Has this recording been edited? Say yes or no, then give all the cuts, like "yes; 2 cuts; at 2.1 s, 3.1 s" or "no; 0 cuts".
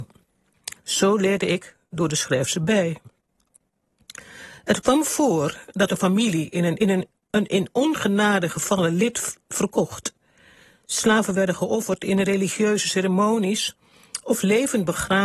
yes; 1 cut; at 6.8 s